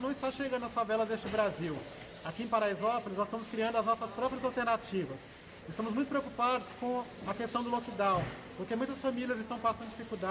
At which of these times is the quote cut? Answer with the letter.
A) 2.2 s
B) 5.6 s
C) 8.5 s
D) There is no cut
B